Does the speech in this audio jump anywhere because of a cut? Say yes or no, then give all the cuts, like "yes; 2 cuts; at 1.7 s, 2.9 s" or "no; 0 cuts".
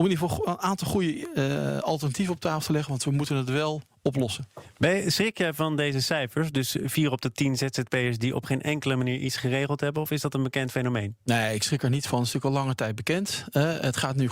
no; 0 cuts